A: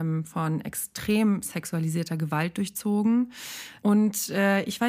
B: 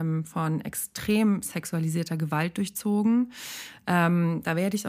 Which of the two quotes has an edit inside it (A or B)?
A